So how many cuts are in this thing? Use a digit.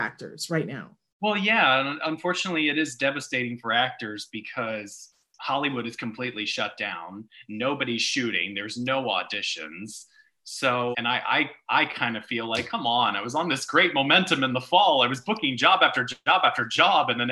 1